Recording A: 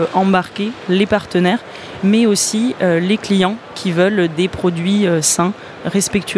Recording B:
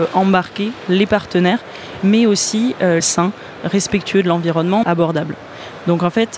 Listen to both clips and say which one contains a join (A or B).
B